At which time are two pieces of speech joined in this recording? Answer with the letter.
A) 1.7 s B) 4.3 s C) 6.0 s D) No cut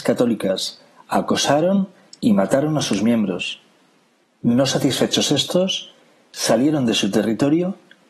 B